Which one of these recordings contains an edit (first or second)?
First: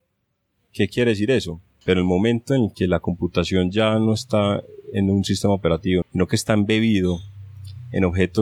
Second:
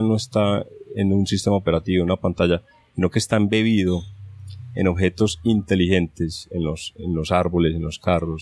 first